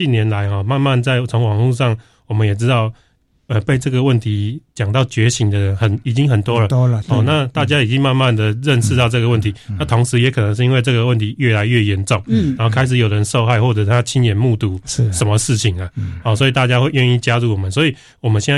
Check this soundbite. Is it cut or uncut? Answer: uncut